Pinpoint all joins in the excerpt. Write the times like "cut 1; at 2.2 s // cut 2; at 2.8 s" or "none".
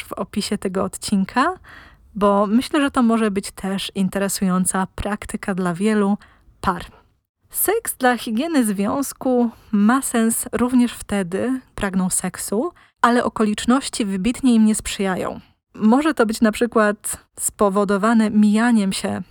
cut 1; at 7.4 s // cut 2; at 11.7 s